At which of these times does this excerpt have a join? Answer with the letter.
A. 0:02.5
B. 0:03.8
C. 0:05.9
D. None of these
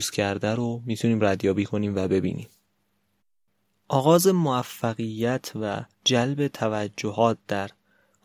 C